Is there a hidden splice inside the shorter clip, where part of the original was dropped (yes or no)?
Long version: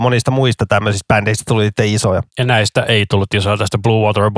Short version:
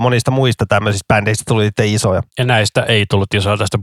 no